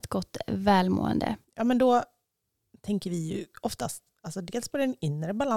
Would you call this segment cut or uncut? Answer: cut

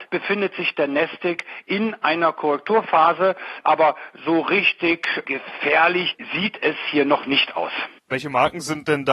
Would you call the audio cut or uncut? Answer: cut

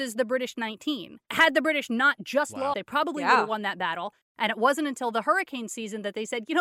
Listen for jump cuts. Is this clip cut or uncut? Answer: cut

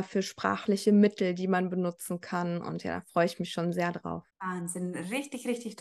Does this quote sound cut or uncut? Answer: cut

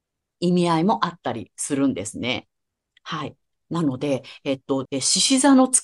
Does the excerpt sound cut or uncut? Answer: cut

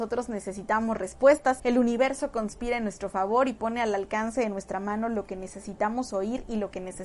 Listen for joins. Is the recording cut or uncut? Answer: cut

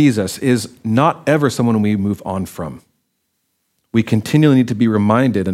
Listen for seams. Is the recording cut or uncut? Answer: uncut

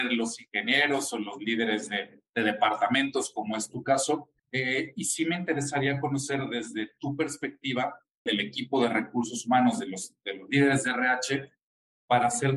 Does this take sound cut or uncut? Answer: cut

